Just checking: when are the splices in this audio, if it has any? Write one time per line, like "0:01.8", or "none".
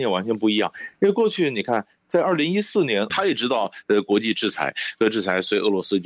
0:03.1